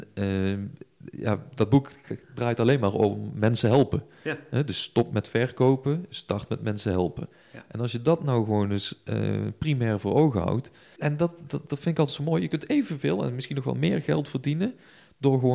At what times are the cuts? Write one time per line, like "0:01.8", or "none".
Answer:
0:11.0